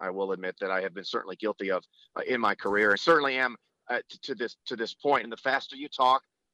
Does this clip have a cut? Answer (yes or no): yes